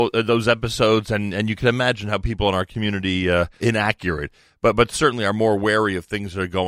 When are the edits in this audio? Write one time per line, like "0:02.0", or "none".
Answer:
0:03.6